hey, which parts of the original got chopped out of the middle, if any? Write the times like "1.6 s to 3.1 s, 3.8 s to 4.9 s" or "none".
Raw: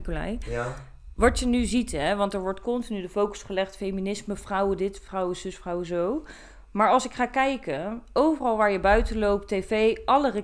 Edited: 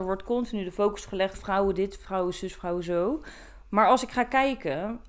3.7 s to 4.4 s